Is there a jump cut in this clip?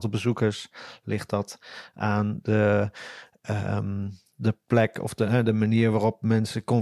no; 0 cuts

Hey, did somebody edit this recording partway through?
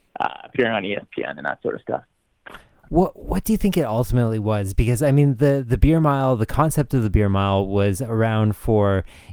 no; 0 cuts

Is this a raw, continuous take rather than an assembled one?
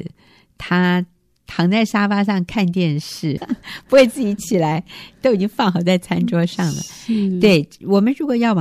no; 1 cut; at 3.4 s

